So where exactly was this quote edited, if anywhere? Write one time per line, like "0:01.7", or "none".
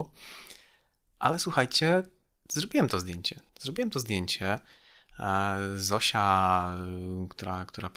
0:03.5